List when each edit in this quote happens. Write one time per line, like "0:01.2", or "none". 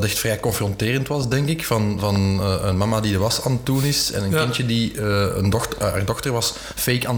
none